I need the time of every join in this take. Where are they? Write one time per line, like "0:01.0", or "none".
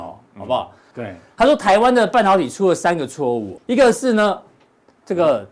0:00.9
0:03.6